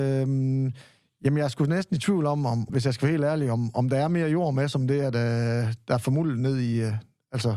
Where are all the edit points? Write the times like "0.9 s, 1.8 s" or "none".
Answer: 2.7 s